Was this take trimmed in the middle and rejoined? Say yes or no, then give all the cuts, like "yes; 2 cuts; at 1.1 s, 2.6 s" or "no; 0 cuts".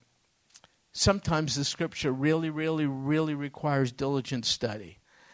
no; 0 cuts